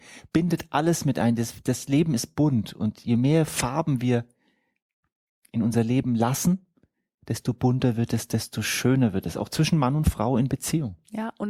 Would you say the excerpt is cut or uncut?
uncut